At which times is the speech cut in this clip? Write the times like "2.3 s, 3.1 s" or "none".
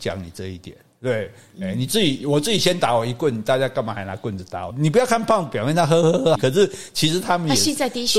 4.7 s, 6.4 s